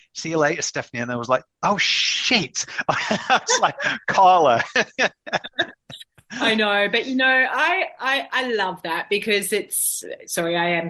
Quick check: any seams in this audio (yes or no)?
no